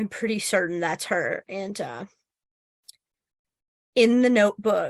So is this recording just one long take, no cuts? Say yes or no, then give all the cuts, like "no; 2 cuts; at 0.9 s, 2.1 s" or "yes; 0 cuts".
yes; 0 cuts